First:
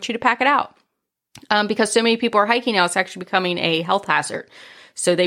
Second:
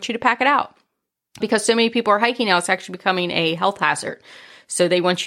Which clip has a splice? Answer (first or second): second